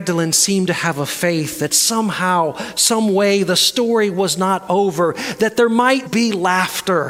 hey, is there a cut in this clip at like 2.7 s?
no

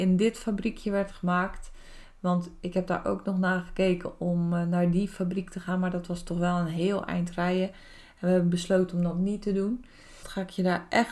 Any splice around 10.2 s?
yes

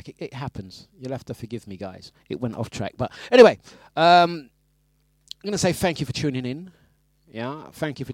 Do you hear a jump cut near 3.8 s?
no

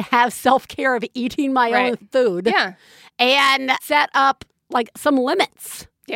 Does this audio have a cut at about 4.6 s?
no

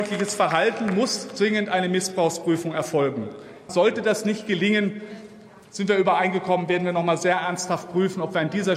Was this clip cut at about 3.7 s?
yes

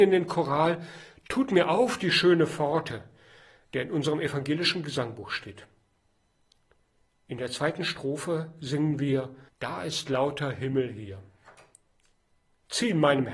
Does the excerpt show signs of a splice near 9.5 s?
yes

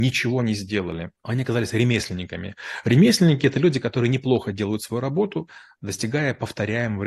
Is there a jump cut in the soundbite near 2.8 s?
no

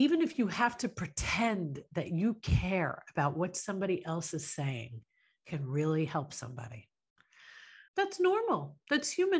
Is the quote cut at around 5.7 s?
no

